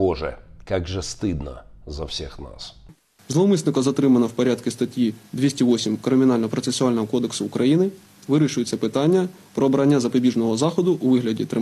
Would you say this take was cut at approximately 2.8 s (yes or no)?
no